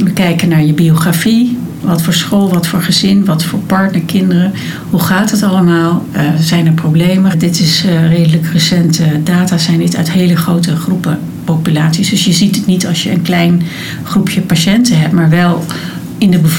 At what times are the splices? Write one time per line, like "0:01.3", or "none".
0:07.3